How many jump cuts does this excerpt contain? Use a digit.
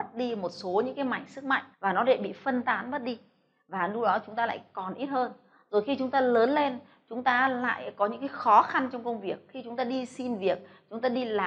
1